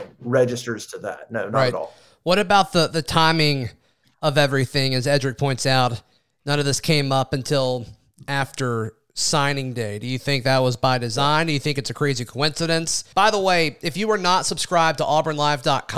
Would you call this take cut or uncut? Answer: cut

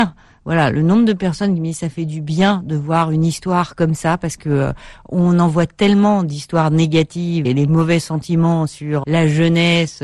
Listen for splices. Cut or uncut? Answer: cut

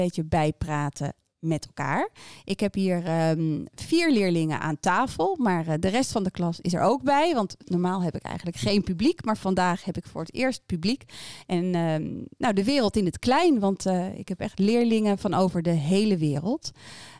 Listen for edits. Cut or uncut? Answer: uncut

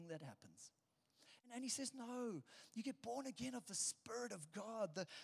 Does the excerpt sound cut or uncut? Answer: cut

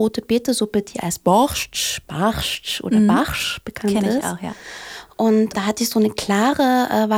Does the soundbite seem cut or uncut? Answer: cut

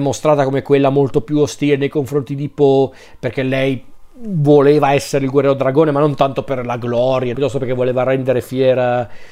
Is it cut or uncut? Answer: cut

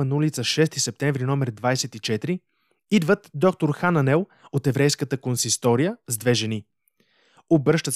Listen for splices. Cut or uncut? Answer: uncut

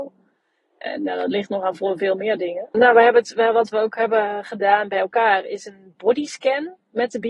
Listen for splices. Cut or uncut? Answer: cut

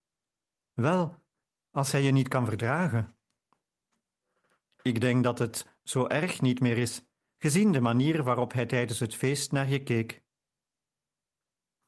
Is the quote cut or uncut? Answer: uncut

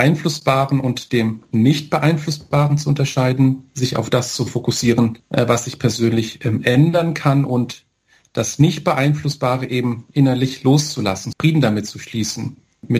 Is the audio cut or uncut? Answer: cut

